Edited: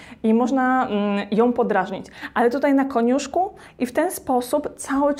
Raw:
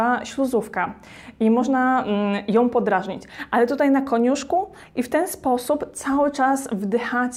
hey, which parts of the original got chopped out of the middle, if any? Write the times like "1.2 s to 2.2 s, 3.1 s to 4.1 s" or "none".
none